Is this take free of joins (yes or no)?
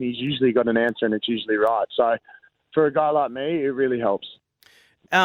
yes